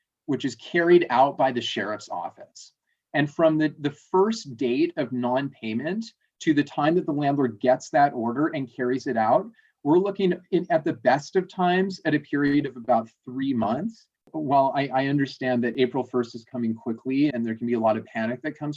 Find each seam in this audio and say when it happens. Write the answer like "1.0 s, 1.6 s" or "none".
14.2 s, 17.3 s